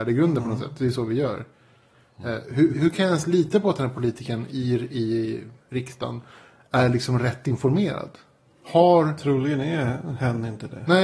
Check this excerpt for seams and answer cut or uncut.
cut